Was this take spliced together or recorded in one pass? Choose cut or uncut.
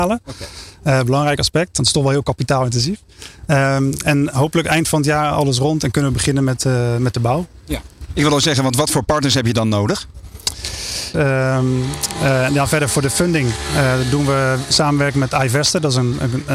cut